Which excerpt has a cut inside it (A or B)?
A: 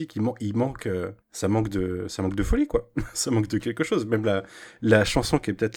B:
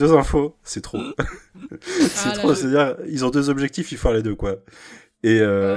A